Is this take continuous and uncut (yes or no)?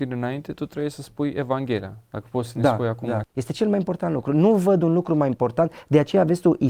no